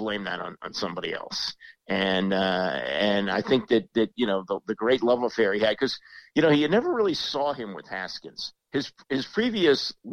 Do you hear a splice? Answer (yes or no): no